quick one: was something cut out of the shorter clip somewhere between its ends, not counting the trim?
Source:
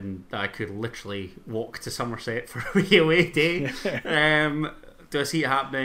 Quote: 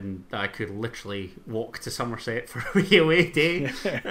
no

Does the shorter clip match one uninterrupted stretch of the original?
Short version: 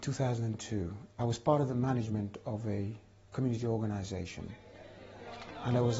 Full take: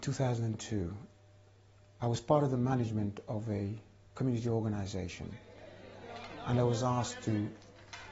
no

